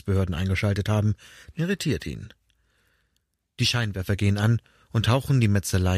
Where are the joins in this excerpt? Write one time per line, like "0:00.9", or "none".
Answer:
0:01.5

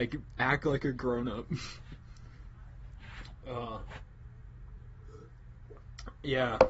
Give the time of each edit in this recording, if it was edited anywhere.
none

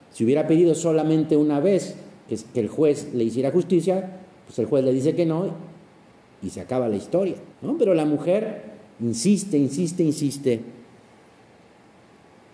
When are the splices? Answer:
0:07.5

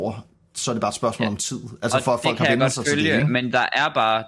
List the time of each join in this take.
none

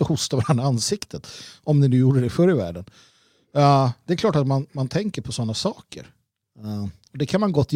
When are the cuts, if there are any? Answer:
0:04.7

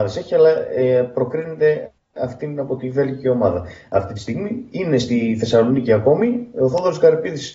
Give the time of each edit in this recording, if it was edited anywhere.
none

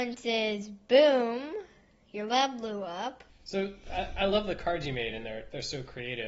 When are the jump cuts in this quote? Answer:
0:03.3

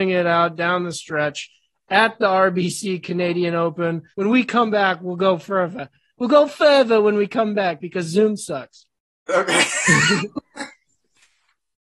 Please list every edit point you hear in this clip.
0:04.1

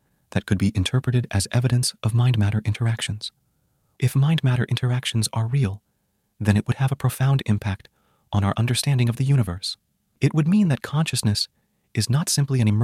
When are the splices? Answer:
none

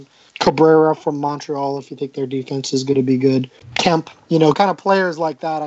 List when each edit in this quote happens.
0:04.5

